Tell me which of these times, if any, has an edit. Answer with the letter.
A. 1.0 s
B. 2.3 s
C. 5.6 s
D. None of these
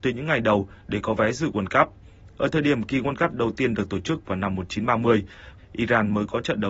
C